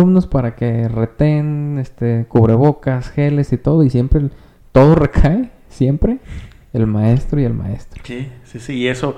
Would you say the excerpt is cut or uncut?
uncut